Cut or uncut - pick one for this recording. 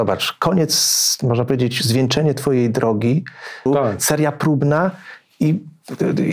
cut